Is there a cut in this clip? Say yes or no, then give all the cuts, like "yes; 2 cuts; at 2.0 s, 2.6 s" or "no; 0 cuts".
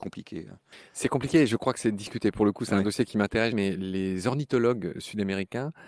yes; 1 cut; at 3.5 s